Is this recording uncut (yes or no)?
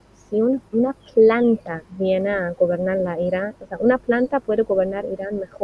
no